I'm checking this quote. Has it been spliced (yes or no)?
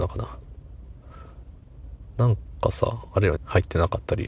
yes